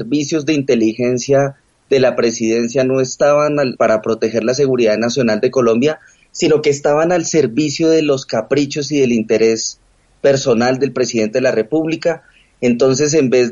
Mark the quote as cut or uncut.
cut